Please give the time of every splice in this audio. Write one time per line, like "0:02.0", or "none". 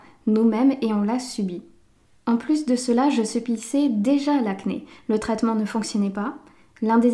none